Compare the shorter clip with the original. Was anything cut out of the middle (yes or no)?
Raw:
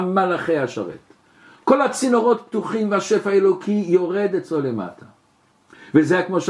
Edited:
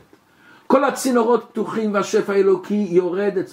no